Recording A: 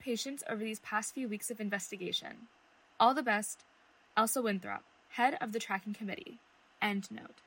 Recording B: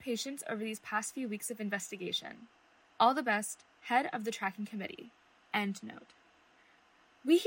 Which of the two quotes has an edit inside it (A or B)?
B